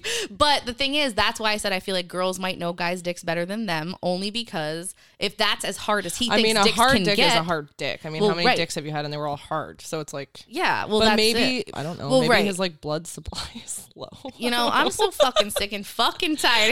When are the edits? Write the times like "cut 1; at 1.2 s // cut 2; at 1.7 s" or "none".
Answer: cut 1; at 11.7 s